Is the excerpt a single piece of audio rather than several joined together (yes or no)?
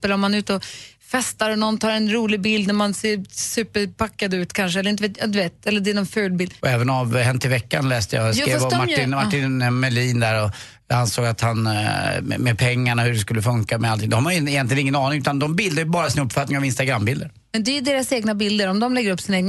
no